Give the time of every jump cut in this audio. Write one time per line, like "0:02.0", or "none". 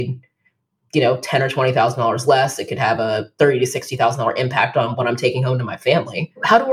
none